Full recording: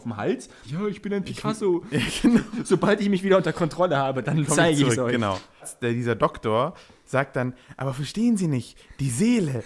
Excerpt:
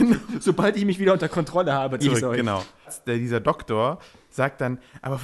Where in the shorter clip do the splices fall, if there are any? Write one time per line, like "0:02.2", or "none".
0:02.0